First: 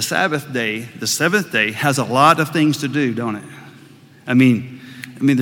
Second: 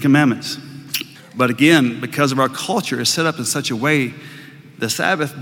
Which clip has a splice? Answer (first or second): second